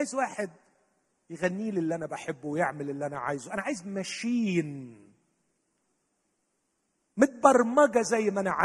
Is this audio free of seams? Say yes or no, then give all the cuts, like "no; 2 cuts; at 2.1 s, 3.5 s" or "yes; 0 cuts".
yes; 0 cuts